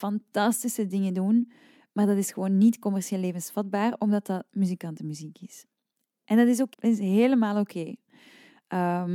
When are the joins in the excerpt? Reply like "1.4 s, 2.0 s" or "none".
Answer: 6.7 s